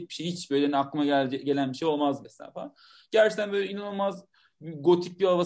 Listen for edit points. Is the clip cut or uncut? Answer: cut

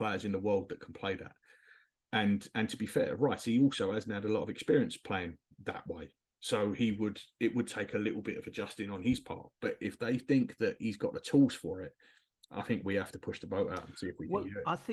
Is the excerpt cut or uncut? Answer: uncut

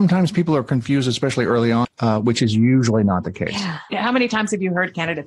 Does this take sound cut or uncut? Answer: cut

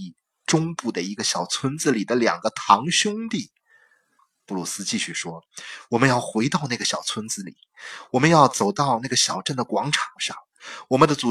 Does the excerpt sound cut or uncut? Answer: cut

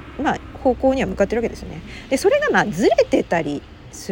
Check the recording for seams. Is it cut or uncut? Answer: uncut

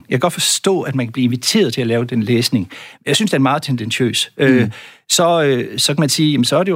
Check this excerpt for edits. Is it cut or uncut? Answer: uncut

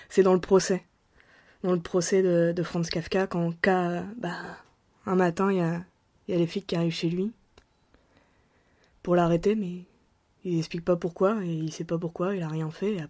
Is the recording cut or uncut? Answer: uncut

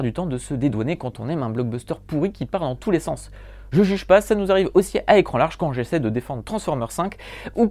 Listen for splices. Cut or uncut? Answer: uncut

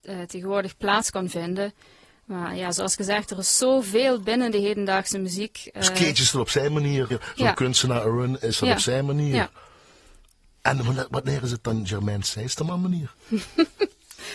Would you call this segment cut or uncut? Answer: cut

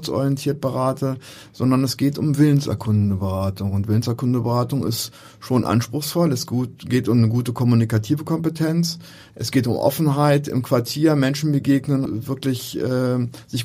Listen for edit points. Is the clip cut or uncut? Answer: cut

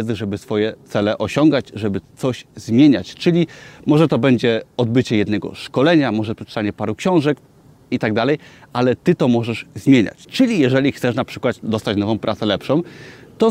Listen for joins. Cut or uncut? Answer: cut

